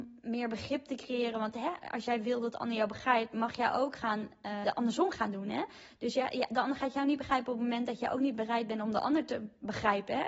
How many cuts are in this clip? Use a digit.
1